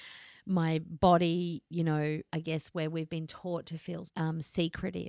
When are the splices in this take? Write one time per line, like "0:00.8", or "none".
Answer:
0:02.3
0:04.1